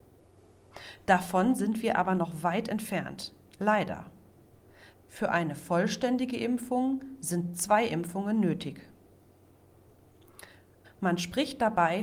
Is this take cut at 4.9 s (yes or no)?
yes